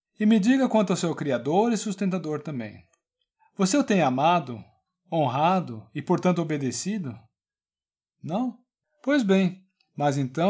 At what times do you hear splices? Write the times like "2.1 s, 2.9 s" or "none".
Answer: 8.8 s